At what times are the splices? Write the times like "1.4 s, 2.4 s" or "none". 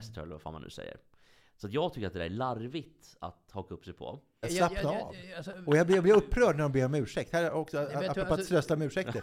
4.4 s